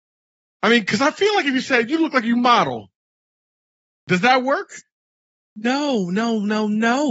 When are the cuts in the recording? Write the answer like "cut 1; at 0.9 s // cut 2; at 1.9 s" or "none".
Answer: none